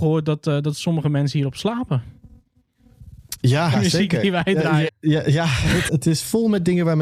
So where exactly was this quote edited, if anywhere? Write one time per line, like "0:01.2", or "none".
0:03.7
0:04.9
0:05.9